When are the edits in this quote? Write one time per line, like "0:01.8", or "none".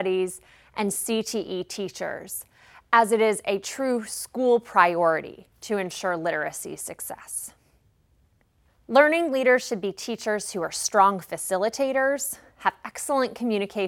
0:08.7